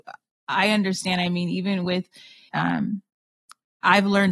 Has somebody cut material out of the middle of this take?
yes; 1 cut; at 2.5 s

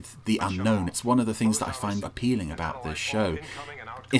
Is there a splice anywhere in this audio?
yes; 1 cut; at 2.0 s

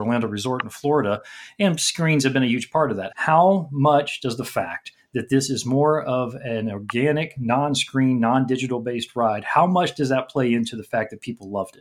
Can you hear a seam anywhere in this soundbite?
yes; 1 cut; at 3.1 s

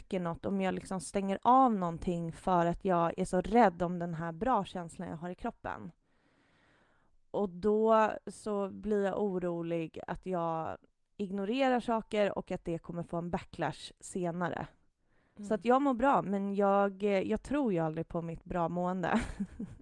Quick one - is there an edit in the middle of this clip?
no; 0 cuts

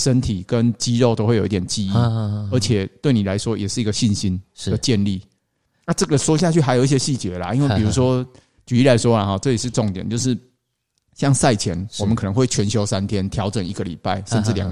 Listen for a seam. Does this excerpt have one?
no; 0 cuts

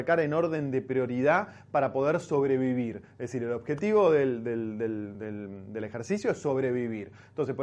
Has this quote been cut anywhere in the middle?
no; 0 cuts

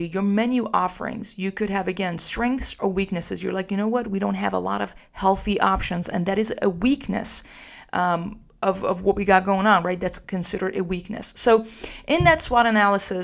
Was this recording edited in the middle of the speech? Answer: no; 0 cuts

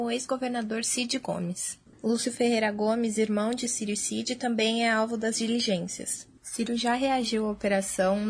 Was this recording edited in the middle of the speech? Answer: yes; 2 cuts; at 1.9 s, 6.4 s

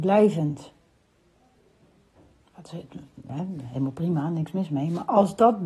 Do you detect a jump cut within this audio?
yes; 1 cut; at 2.4 s

